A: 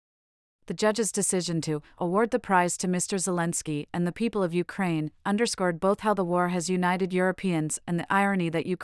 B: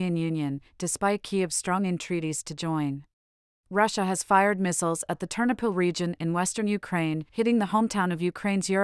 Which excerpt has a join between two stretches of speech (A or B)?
B